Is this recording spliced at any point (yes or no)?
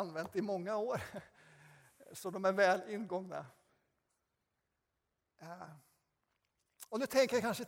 no